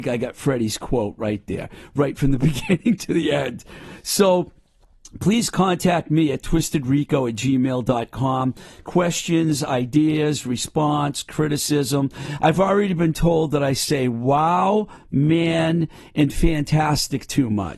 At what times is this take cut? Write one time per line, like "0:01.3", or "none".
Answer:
none